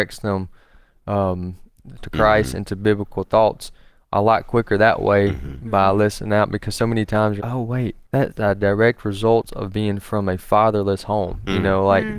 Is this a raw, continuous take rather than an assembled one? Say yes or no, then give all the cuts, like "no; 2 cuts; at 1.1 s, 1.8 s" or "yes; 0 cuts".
no; 2 cuts; at 2.0 s, 7.4 s